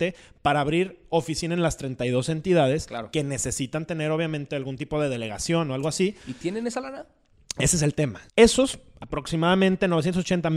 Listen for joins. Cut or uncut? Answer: cut